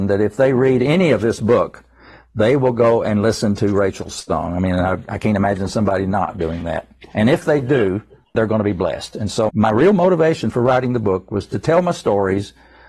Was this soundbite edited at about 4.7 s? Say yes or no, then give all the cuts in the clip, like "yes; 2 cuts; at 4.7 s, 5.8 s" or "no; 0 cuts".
no; 2 cuts; at 8.3 s, 9.5 s